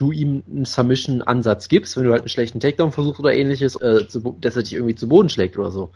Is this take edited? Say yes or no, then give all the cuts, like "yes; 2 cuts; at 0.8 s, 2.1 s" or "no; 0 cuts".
yes; 1 cut; at 3.8 s